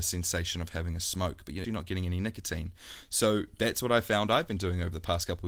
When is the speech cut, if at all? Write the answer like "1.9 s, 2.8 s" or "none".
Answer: 1.6 s